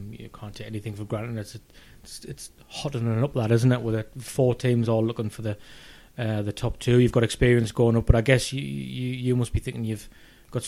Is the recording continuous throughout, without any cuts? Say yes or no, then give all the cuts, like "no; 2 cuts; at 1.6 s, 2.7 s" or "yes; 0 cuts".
yes; 0 cuts